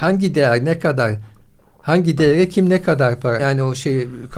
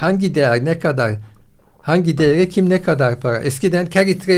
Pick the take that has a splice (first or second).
first